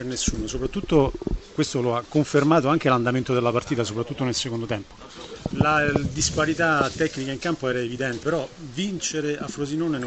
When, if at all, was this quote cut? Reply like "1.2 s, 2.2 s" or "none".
5.5 s, 8.2 s